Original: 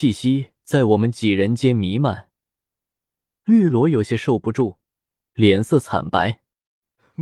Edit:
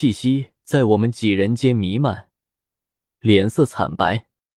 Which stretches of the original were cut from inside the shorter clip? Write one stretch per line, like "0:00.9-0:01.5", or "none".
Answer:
0:03.1-0:05.2